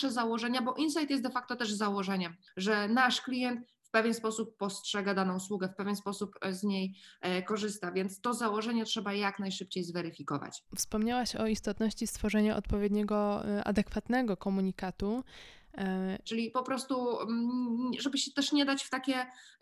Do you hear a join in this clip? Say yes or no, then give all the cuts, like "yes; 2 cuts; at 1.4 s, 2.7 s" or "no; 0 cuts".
yes; 2 cuts; at 10.7 s, 16.2 s